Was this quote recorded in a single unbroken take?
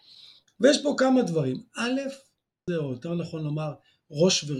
no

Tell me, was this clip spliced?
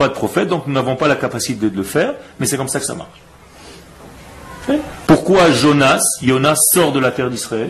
no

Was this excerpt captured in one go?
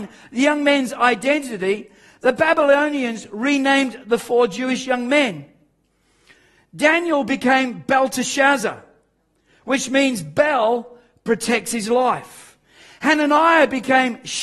yes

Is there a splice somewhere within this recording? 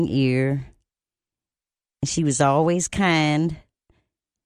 no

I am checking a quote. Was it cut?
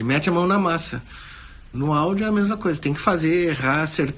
yes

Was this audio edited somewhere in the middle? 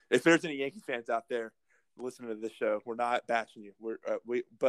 no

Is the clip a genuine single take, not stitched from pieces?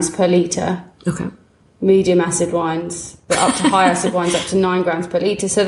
yes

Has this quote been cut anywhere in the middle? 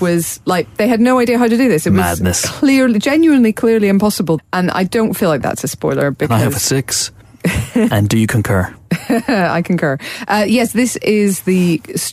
yes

